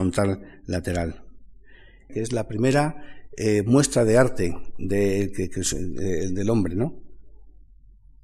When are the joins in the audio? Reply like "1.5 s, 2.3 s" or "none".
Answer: 2.1 s